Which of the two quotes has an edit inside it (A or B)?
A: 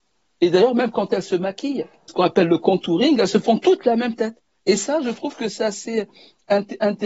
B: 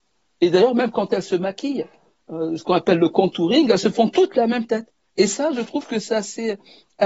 A